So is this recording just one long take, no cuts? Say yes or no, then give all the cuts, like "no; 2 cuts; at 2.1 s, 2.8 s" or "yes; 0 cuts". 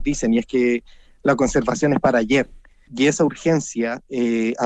no; 1 cut; at 2.9 s